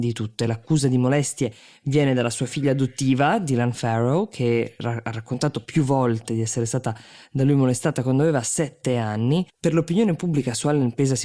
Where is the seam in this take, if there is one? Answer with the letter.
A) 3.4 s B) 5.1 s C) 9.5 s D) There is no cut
C